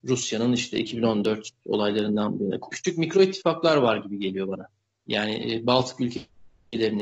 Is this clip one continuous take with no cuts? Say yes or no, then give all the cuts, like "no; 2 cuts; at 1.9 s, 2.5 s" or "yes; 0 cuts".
no; 1 cut; at 2.7 s